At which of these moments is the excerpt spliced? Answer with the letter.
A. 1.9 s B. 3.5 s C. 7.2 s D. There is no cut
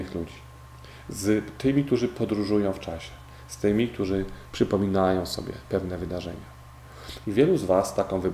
C